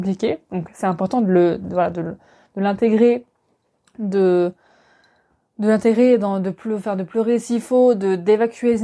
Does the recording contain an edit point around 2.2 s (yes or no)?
no